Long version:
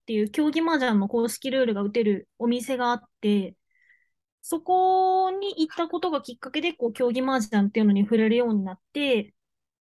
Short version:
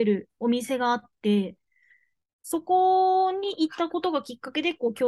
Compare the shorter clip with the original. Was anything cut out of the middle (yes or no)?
no